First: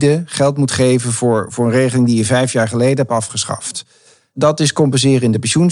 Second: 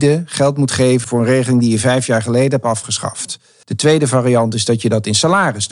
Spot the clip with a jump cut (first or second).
second